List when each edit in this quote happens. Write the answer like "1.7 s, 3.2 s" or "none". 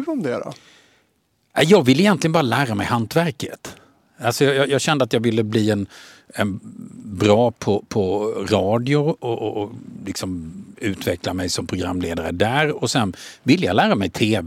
none